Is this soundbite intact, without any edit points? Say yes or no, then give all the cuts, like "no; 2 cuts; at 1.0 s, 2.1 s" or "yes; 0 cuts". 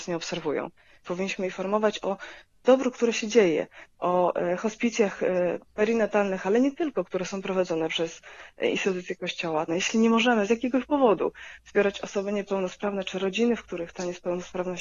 no; 2 cuts; at 1.0 s, 9.7 s